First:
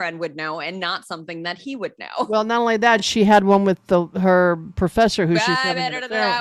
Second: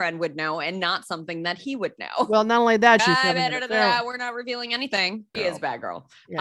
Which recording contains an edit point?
second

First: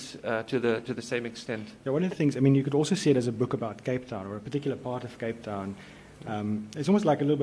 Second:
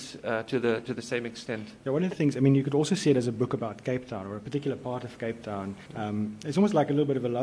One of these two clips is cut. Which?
second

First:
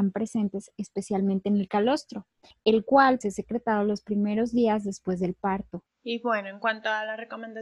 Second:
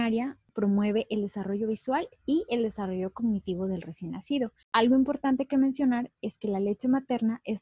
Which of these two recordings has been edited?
first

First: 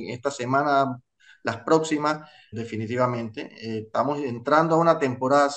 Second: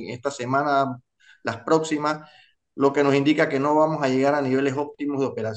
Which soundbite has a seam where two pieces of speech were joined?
first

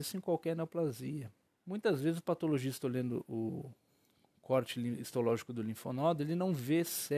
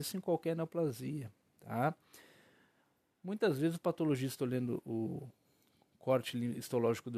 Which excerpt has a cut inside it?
first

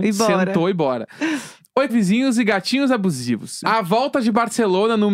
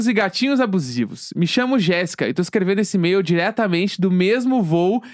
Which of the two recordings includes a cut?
first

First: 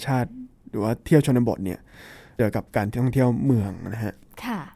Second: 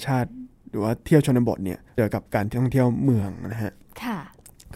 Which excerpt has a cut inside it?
second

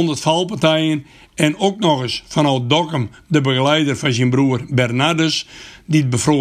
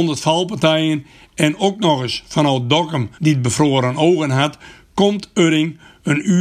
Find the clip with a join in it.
second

